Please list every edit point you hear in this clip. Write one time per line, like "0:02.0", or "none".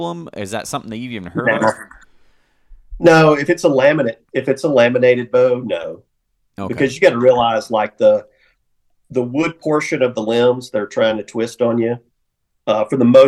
none

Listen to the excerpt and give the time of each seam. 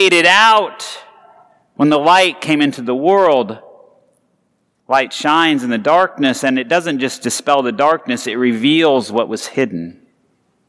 0:04.8

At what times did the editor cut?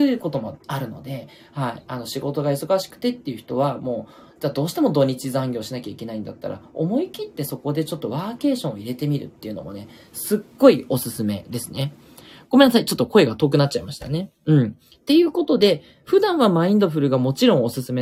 none

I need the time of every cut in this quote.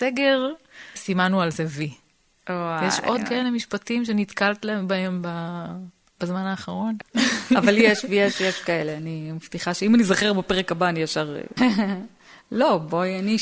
0:00.9
0:07.0
0:11.6

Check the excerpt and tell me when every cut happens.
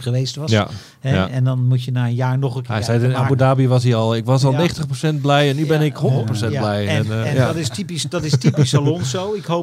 none

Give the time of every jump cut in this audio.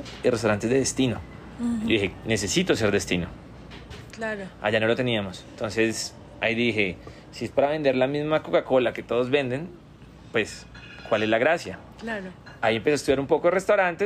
0:04.1

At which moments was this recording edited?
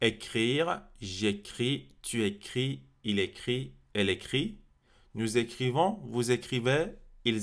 none

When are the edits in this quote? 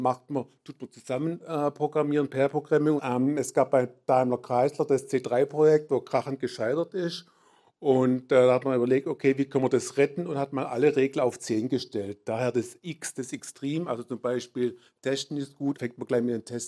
0:03.0
0:15.7

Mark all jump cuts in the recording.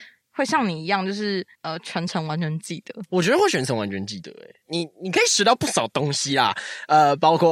0:01.5
0:04.6

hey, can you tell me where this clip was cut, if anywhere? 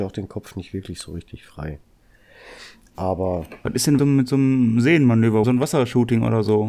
0:04.0
0:05.4

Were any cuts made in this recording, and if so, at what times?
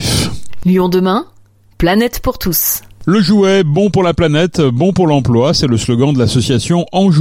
none

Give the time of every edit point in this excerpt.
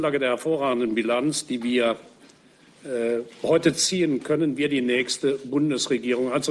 none

